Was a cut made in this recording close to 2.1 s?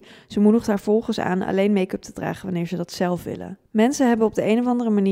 no; 1 cut; at 3.7 s

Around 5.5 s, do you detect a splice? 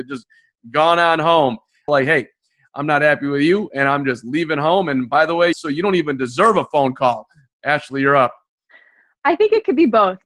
yes; 2 cuts; at 1.9 s, 5.5 s

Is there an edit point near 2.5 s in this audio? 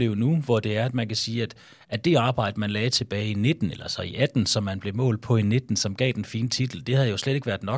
no; 0 cuts

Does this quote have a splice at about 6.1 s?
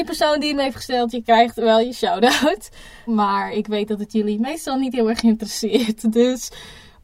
no; 1 cut; at 3.1 s

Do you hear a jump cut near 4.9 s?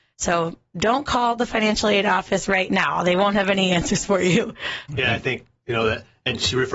yes; 1 cut; at 4.9 s

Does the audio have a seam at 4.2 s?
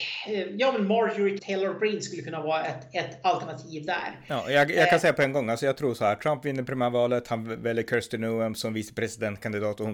no; 1 cut; at 1.4 s

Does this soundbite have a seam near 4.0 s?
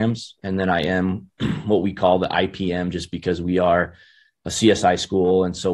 no; 0 cuts

